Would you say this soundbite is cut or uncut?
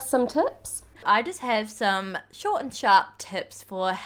cut